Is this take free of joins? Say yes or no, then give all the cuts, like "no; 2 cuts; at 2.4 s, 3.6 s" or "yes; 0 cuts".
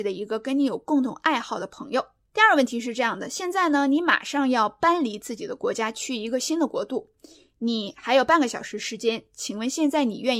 no; 1 cut; at 2.3 s